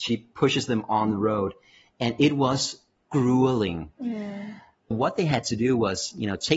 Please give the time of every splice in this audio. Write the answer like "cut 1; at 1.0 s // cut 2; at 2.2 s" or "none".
cut 1; at 3.9 s